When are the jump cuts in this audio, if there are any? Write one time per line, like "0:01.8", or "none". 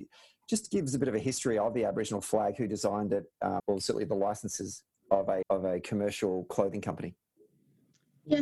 0:03.6
0:05.4